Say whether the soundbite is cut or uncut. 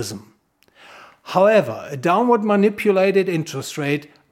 uncut